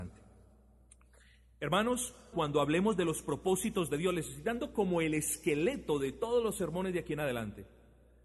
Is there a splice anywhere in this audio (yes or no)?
yes